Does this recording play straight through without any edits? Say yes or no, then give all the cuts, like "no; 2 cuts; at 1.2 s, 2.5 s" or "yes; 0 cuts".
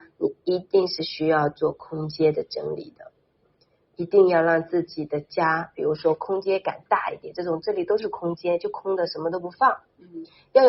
yes; 0 cuts